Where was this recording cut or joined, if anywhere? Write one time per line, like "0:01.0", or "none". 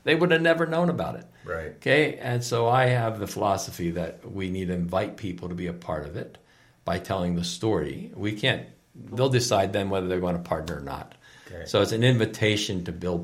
0:09.1